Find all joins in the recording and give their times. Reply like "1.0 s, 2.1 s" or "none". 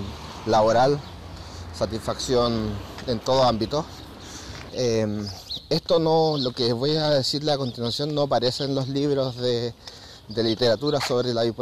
4.7 s